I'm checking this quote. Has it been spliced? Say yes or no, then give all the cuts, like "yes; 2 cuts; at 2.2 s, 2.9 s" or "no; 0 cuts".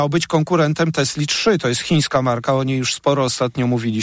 no; 0 cuts